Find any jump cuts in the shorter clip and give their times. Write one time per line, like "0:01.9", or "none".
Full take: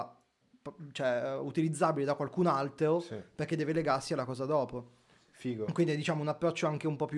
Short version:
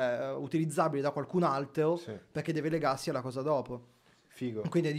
none